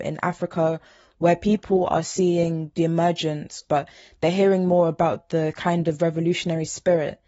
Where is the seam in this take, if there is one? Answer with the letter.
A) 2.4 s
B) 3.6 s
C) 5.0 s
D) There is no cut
B